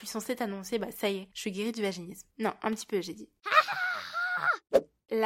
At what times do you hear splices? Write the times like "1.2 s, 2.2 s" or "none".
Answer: 2.3 s